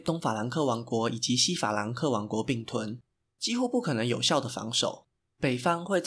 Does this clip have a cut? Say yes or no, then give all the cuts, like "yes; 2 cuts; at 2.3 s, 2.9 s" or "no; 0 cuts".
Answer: yes; 1 cut; at 3.3 s